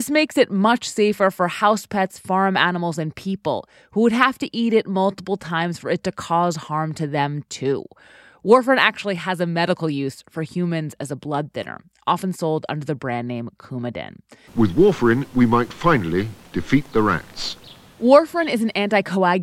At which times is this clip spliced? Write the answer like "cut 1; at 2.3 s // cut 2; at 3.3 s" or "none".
cut 1; at 14.5 s

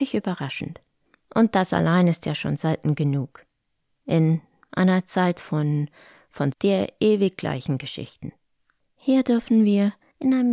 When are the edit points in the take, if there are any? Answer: cut 1; at 6.5 s

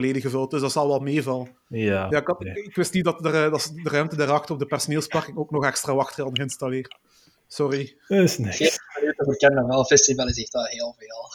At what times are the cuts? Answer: none

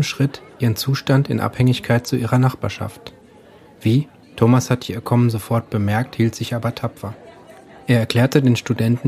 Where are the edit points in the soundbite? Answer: cut 1; at 4.2 s

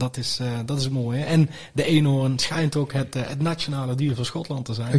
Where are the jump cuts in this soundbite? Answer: none

